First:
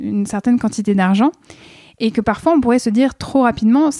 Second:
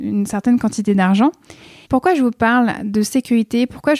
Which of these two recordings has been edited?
second; 1 cut; at 1.8 s

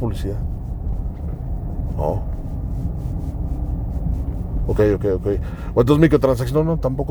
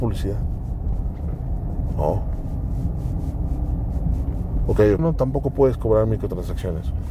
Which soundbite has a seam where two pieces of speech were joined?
second; 1 cut; at 5.0 s

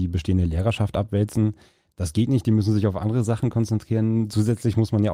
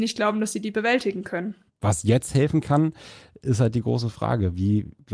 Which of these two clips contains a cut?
second; 1 cut; at 1.7 s

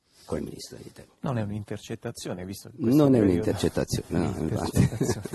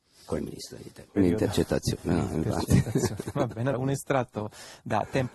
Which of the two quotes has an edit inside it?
second; 2 cuts; at 1.2 s, 3.7 s

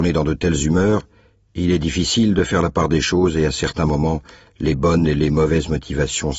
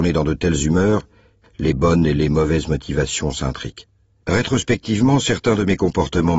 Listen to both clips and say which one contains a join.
second; 2 cuts; at 1.4 s, 4.2 s

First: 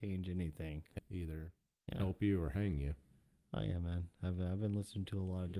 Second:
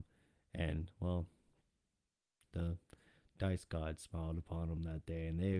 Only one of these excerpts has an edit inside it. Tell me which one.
first; 1 cut; at 1.0 s

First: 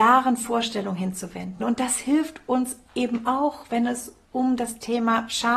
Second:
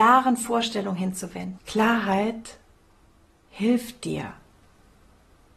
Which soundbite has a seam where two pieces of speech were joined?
second; 1 cut; at 1.6 s

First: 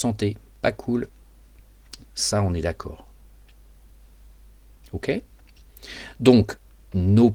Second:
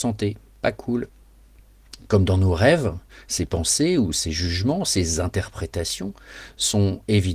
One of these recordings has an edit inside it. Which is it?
first; 1 cut; at 2.0 s

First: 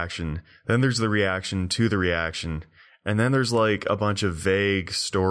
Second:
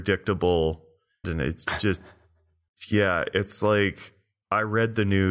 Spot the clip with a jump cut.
second; 1 cut; at 1.2 s

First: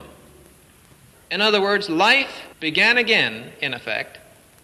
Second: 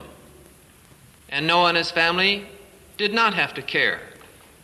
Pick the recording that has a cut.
first; 2 cuts; at 1.1 s, 2.5 s

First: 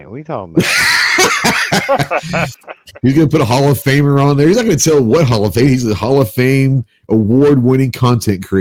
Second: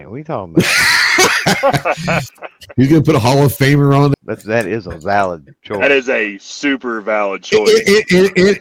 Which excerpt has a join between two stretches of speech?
second; 2 cuts; at 1.3 s, 4.1 s

